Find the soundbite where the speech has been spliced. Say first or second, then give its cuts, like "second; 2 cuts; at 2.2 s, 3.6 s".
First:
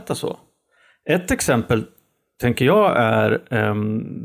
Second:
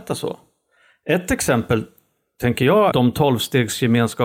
second; 1 cut; at 2.9 s